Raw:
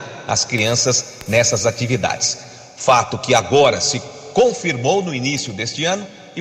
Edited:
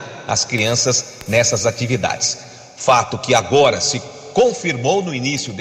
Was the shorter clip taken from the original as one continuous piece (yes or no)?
yes